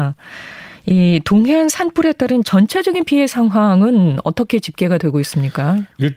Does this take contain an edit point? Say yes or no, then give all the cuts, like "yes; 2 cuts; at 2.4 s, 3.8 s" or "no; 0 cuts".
no; 0 cuts